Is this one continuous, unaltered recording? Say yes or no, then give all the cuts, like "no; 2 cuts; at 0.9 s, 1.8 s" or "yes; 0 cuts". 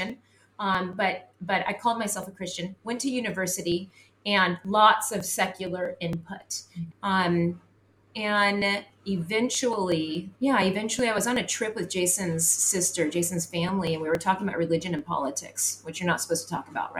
no; 2 cuts; at 6.9 s, 10.3 s